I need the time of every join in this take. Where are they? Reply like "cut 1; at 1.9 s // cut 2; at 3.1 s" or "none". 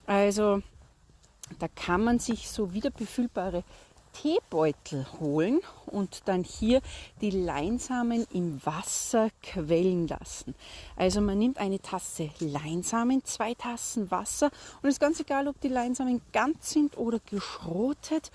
none